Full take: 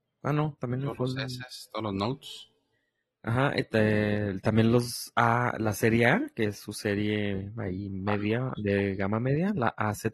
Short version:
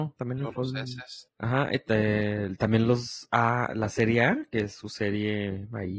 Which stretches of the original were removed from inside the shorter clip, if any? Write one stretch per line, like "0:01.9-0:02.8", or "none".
0:01.7-0:03.1